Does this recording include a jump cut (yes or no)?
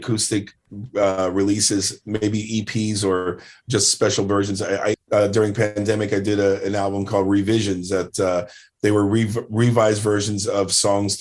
yes